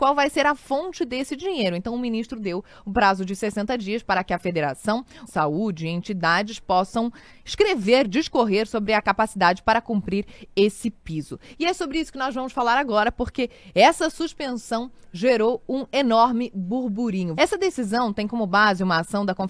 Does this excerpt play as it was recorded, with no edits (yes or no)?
no